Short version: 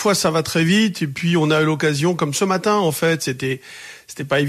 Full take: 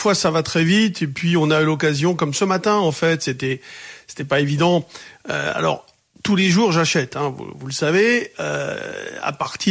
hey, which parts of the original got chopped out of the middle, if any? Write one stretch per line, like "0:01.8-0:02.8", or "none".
none